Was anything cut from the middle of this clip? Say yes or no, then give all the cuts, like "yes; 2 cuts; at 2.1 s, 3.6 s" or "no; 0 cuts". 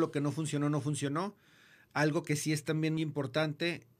yes; 1 cut; at 3.0 s